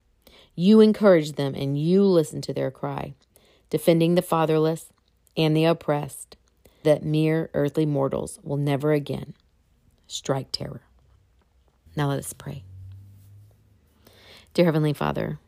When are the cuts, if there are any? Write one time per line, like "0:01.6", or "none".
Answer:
0:06.8
0:11.9